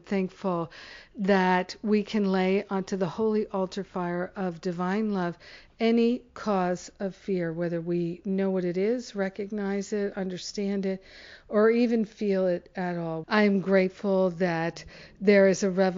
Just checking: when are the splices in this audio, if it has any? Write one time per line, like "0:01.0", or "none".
0:13.2